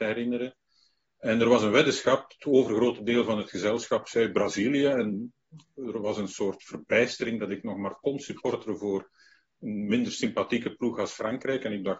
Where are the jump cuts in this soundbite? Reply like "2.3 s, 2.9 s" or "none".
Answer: none